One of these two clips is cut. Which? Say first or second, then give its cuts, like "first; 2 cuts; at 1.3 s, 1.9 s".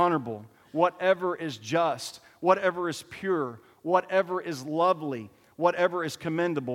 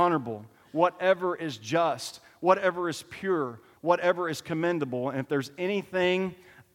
second; 1 cut; at 3.7 s